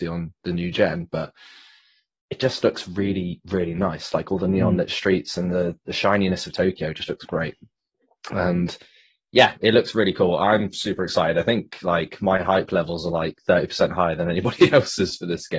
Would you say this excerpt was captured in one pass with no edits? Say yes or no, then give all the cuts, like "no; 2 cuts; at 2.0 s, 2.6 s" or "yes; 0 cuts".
yes; 0 cuts